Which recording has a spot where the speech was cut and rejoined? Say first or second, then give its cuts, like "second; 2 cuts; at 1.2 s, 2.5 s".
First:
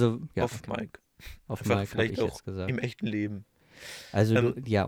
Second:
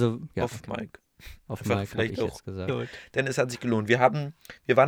second; 1 cut; at 2.7 s